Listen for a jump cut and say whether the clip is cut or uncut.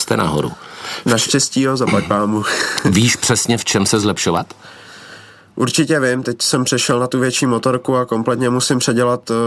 uncut